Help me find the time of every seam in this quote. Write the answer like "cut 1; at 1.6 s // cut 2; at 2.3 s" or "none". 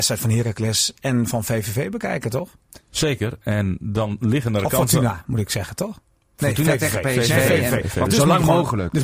cut 1; at 8.1 s